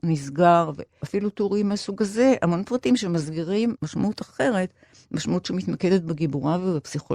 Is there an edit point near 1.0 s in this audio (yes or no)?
yes